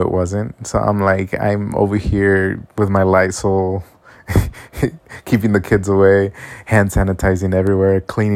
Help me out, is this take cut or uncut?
uncut